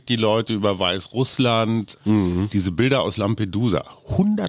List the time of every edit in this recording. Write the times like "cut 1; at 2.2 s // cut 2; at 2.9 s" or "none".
cut 1; at 2.0 s